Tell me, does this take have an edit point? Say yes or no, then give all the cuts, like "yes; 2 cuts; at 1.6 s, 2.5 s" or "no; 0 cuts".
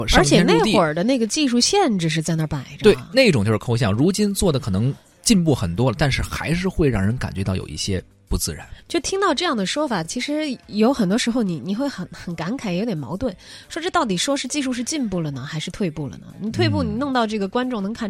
no; 0 cuts